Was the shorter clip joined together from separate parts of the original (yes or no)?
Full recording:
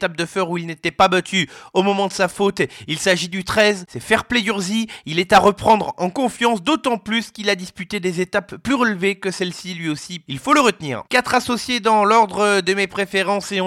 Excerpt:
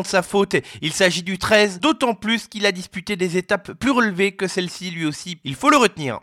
yes